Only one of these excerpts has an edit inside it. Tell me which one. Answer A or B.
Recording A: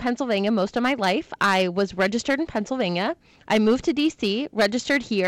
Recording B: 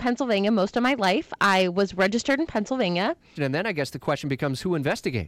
B